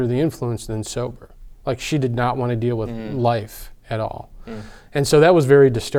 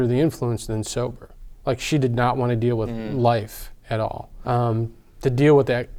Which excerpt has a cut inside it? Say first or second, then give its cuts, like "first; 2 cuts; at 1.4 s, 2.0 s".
second; 1 cut; at 4.4 s